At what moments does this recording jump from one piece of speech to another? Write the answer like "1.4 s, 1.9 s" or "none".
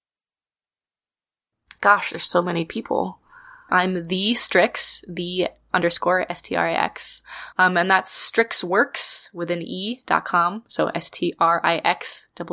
3.7 s, 7.5 s